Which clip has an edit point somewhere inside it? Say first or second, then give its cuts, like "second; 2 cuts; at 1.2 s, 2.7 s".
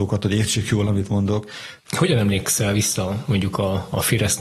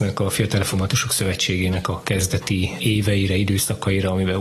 first; 1 cut; at 1.8 s